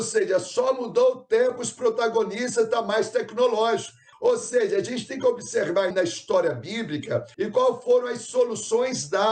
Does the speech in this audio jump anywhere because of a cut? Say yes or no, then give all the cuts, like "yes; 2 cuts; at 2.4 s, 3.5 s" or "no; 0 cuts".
yes; 3 cuts; at 4.1 s, 5.9 s, 7.3 s